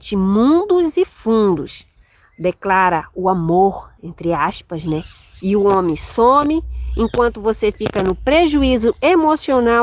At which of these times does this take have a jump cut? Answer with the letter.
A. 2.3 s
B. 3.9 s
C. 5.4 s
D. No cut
C